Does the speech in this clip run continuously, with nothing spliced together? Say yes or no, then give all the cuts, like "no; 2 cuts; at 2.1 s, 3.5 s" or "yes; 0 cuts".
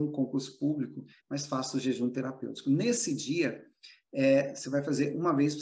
no; 1 cut; at 1.2 s